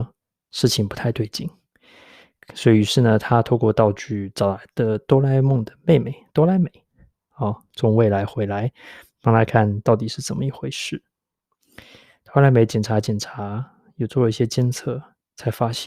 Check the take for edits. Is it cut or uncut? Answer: cut